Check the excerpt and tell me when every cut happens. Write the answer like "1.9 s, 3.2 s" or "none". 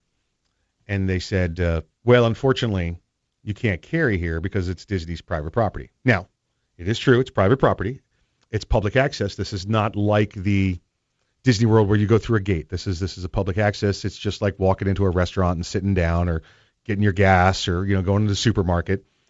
none